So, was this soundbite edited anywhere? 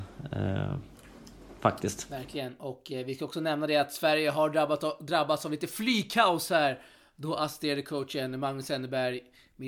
no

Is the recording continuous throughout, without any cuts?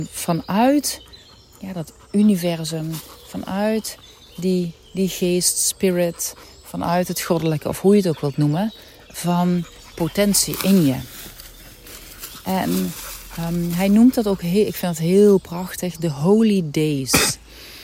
yes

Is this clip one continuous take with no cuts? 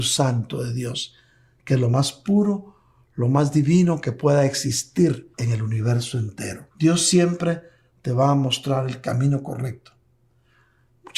no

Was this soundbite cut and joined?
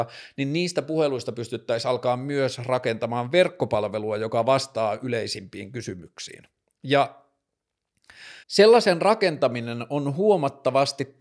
yes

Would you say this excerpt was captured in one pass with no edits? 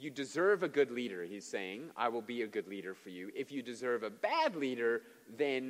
yes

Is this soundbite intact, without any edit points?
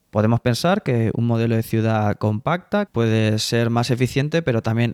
no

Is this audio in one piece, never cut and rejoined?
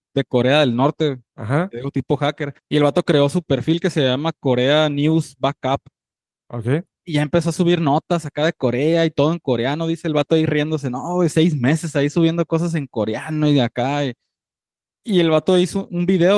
no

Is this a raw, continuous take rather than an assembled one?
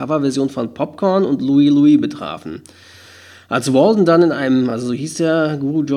yes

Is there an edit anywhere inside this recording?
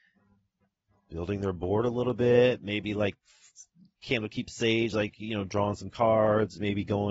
no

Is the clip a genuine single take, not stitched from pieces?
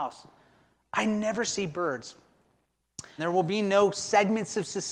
no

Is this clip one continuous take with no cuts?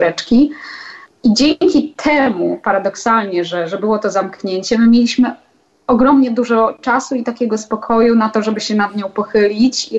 yes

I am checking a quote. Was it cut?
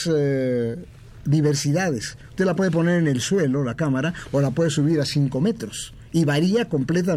no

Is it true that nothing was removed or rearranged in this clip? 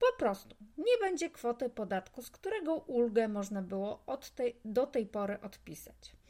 yes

